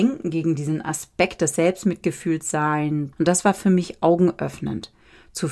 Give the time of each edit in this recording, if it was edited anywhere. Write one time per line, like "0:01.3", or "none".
0:03.1